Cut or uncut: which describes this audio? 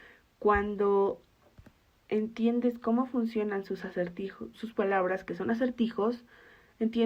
cut